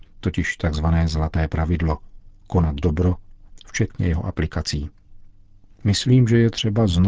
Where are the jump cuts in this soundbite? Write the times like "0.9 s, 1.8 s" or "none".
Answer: 3.6 s